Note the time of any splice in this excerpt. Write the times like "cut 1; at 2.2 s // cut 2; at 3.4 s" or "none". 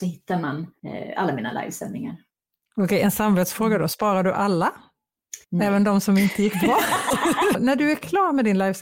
cut 1; at 5.4 s // cut 2; at 7.5 s